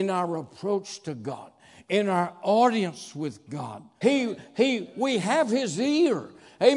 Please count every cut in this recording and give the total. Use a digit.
1